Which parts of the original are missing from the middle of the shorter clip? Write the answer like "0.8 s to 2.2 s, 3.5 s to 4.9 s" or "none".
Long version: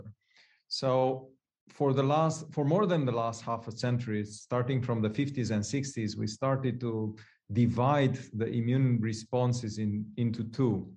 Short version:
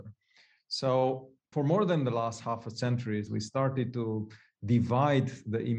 1.5 s to 2.5 s, 4.3 s to 6.1 s